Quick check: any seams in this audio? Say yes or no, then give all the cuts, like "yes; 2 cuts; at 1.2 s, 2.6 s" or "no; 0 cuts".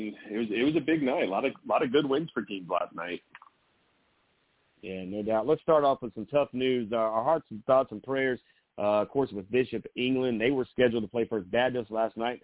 no; 0 cuts